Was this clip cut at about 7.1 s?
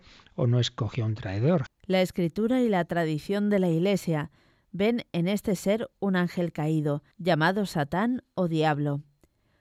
yes; 2 cuts; at 1.7 s, 7.1 s

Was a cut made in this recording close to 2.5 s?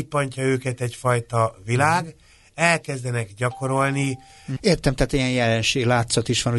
no; 1 cut; at 4.6 s

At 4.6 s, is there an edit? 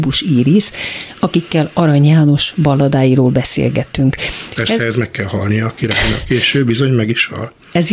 yes; 1 cut; at 4.6 s

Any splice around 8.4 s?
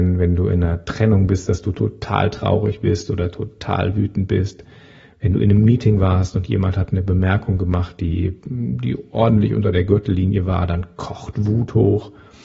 no; 0 cuts

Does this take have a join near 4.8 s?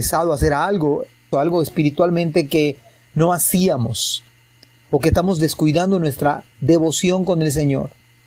no; 2 cuts; at 1.3 s, 6.5 s

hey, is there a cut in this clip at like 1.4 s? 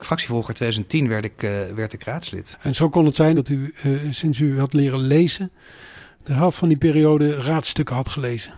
no; 1 cut; at 3.4 s

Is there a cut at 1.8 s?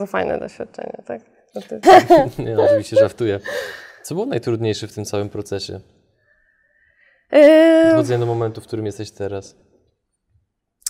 yes; 1 cut; at 1.8 s

